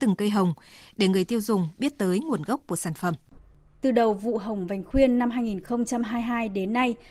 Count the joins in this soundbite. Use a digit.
0